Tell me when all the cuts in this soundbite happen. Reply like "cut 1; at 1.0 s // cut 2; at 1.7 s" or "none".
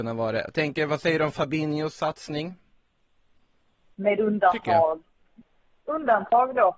cut 1; at 3.9 s